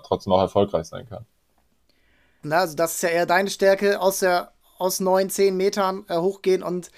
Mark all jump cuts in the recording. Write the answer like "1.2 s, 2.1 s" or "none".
2.4 s